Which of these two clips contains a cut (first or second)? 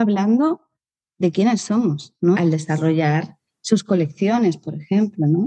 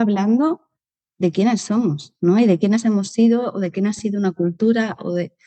first